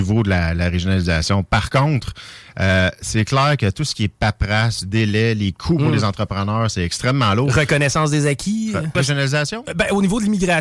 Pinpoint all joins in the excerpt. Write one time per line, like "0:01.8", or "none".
0:08.9

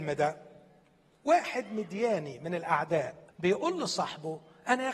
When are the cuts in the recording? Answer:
0:03.3

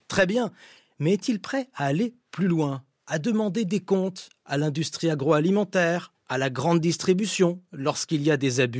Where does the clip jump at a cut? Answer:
none

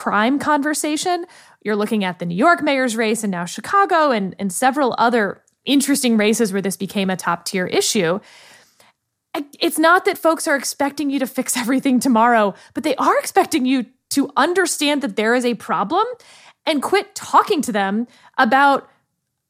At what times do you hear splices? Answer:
none

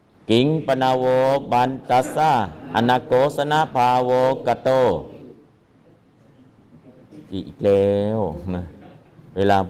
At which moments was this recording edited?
0:01.8

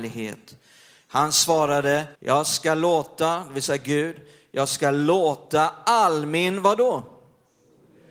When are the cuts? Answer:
0:02.2

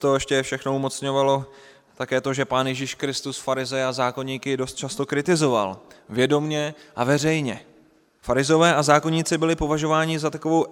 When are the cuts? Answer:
0:08.2

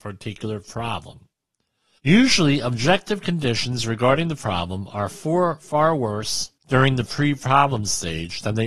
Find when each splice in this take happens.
0:02.0
0:06.6

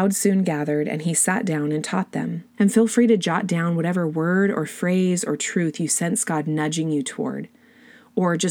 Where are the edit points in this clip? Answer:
0:02.5

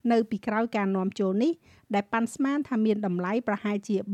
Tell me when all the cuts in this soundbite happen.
none

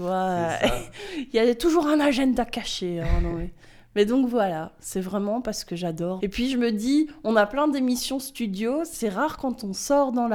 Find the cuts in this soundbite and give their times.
0:06.2

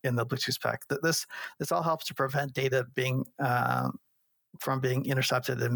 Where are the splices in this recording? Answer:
none

